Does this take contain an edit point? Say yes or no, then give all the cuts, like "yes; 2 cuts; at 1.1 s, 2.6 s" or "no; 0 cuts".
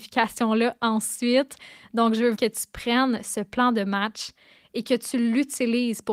yes; 1 cut; at 2.3 s